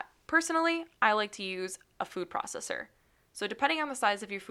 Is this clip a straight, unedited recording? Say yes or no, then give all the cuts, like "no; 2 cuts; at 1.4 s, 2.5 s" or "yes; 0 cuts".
yes; 0 cuts